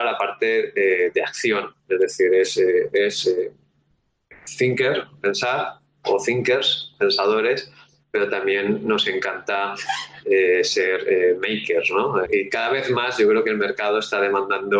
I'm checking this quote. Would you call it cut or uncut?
cut